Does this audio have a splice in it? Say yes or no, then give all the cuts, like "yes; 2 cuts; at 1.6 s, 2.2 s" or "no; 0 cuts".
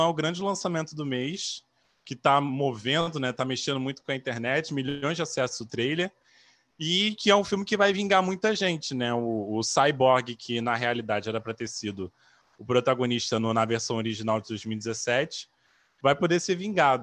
no; 0 cuts